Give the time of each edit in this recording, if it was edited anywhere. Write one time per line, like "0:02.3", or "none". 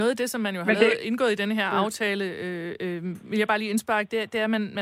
none